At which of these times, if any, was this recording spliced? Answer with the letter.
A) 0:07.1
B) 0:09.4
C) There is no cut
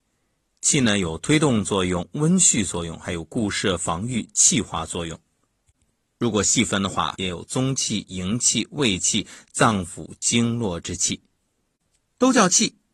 A